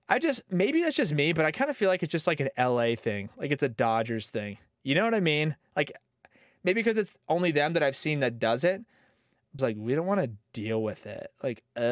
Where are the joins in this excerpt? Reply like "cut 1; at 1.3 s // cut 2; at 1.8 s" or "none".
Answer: cut 1; at 9.6 s